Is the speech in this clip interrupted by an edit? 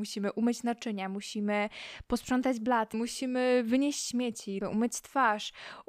yes; 2 cuts; at 2.9 s, 4.6 s

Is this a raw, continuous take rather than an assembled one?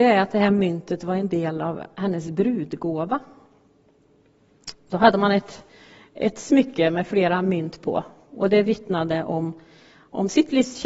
yes; 0 cuts

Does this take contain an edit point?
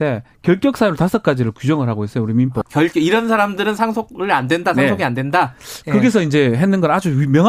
yes; 1 cut; at 2.6 s

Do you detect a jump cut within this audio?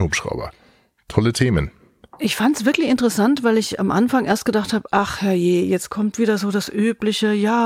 no; 0 cuts

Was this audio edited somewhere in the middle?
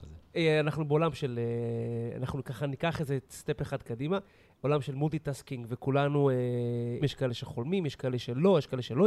yes; 1 cut; at 7.0 s

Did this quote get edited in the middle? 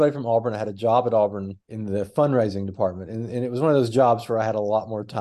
yes; 1 cut; at 1.6 s

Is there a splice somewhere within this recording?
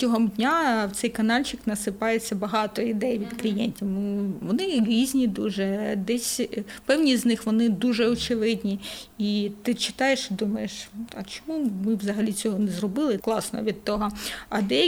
yes; 1 cut; at 13.2 s

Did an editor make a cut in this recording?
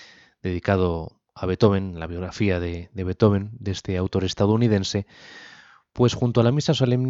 no; 0 cuts

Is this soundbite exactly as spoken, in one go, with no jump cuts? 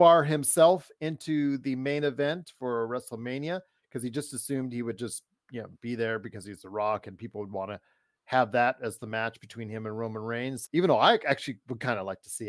yes; 0 cuts

